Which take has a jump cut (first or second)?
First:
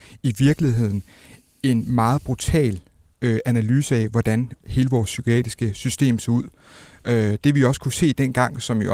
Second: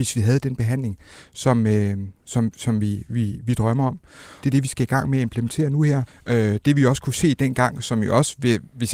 second